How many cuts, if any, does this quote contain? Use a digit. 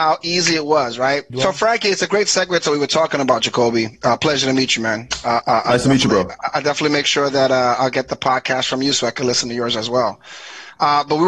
1